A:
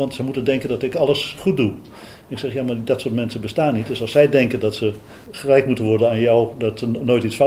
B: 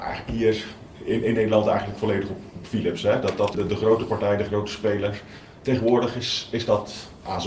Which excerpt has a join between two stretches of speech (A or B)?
B